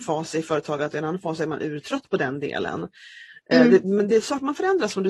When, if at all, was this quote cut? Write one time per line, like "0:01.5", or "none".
none